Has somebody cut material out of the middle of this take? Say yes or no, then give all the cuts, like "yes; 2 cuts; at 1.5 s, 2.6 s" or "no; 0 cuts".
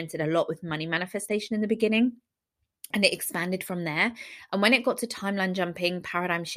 no; 0 cuts